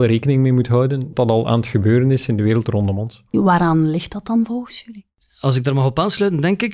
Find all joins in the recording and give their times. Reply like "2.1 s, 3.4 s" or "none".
1.1 s, 3.3 s